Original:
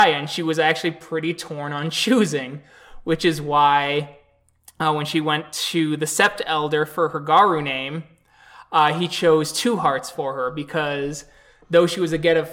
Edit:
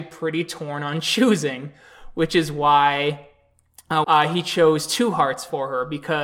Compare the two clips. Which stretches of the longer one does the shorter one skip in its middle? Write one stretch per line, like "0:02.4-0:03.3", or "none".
0:04.9-0:08.7

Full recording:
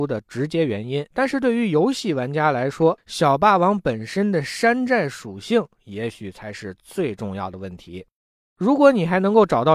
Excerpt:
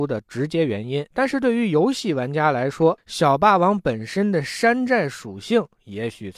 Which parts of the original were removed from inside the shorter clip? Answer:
none

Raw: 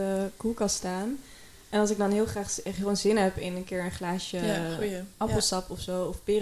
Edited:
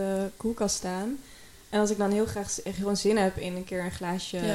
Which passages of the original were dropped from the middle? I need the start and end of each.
none

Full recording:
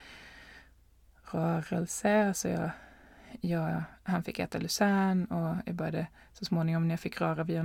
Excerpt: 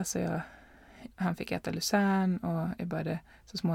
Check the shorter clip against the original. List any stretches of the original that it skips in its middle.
0:03.4-0:04.0

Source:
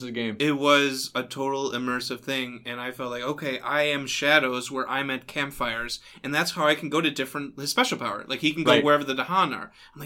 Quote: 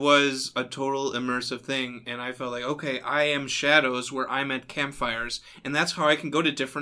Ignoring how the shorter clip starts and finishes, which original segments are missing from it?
none

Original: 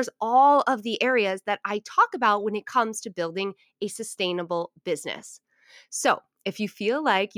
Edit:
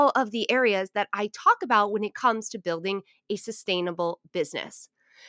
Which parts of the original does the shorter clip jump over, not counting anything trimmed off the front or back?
none

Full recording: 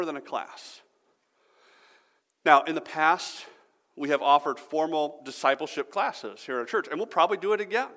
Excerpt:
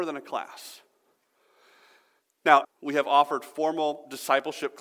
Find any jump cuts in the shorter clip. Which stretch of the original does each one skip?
0:02.6-0:03.8

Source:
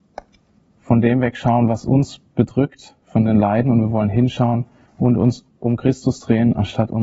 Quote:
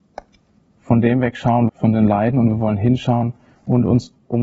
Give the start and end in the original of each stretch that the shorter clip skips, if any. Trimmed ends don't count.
0:01.7-0:03.0

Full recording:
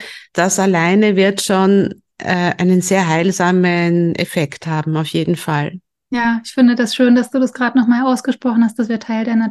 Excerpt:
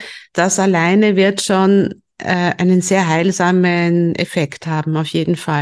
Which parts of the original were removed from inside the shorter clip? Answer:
none

